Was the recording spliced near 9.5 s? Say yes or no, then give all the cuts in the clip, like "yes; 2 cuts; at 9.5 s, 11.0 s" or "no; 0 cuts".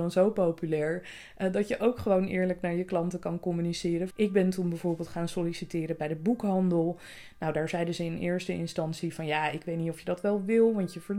no; 1 cut; at 4.1 s